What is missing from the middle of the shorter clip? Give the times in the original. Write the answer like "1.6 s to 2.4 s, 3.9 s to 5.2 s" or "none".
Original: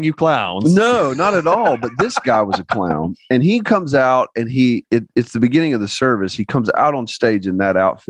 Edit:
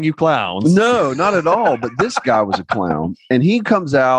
none